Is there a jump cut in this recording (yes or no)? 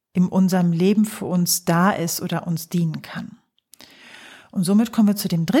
no